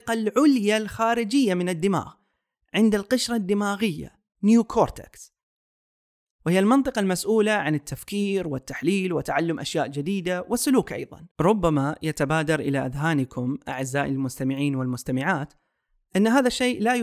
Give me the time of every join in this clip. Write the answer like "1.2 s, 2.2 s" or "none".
11.3 s